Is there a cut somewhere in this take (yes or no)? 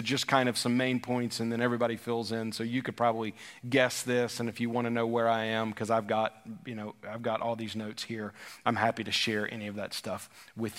no